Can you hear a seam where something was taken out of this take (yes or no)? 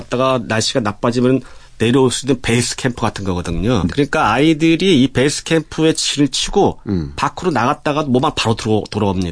yes